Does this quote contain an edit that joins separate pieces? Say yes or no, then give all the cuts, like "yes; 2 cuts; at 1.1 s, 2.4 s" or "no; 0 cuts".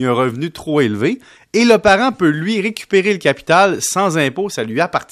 no; 0 cuts